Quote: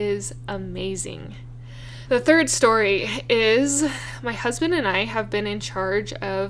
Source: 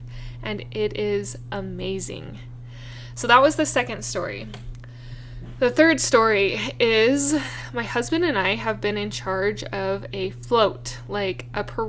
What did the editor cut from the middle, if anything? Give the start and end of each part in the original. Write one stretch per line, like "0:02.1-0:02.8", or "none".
0:03.1-0:05.5